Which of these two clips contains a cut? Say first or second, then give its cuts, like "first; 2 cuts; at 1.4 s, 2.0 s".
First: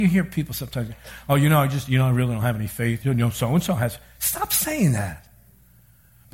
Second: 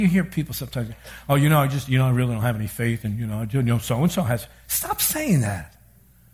first; 1 cut; at 3.0 s